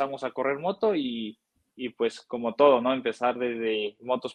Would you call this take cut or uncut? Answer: uncut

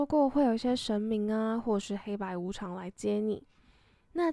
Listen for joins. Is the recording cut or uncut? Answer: uncut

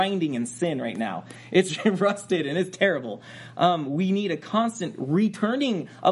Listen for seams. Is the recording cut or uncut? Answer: uncut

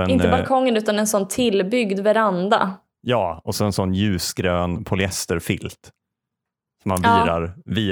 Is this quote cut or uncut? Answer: uncut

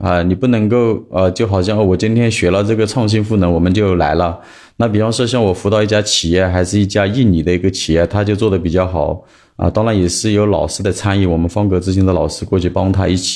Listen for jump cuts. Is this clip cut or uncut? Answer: uncut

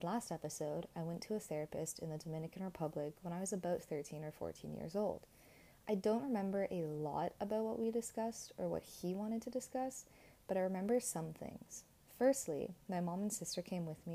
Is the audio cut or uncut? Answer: uncut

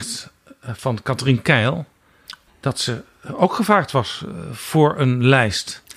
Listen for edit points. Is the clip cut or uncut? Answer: cut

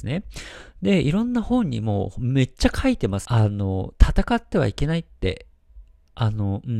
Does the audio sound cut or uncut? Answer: cut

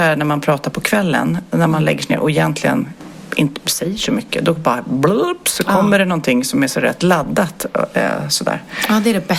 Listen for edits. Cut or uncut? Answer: uncut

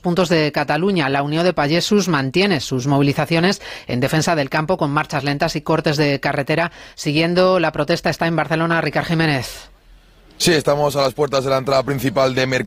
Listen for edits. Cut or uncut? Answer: uncut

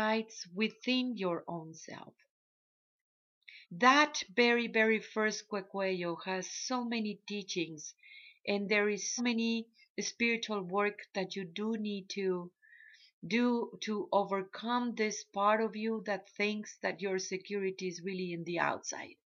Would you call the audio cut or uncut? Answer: cut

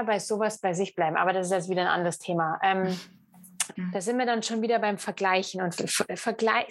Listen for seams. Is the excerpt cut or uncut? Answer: cut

